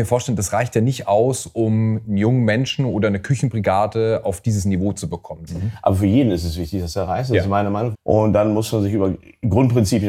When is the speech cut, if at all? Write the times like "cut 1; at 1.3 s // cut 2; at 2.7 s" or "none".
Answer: cut 1; at 5.5 s // cut 2; at 7.9 s